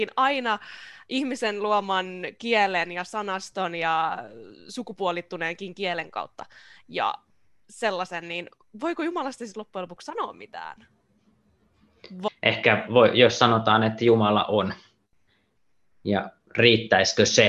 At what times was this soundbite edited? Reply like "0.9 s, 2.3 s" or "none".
12.3 s